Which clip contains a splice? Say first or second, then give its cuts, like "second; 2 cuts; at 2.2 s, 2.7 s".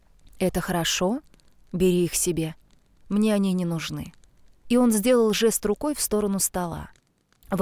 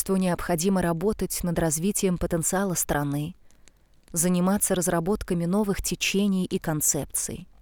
first; 1 cut; at 4.6 s